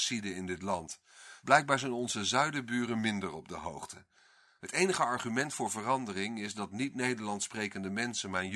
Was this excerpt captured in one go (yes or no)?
yes